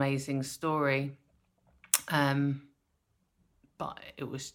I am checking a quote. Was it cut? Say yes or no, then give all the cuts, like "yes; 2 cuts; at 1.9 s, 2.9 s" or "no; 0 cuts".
no; 0 cuts